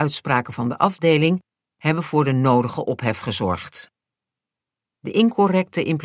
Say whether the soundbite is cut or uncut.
cut